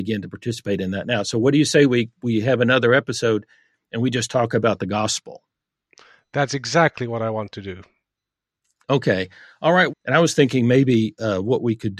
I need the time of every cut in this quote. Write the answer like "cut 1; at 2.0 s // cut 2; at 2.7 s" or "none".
cut 1; at 9.9 s